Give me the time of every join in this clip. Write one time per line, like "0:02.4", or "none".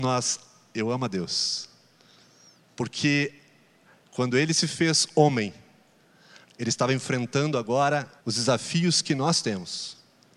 0:02.7
0:06.4
0:08.2